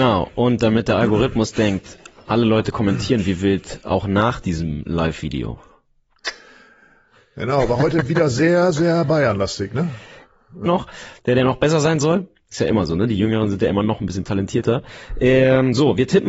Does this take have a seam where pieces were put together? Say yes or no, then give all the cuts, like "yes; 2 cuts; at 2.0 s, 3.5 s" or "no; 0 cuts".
yes; 1 cut; at 10.7 s